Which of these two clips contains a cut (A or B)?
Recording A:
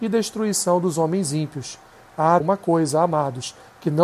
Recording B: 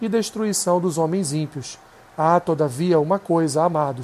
A